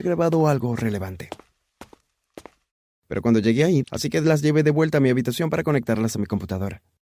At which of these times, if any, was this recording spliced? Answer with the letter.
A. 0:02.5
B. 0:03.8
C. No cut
B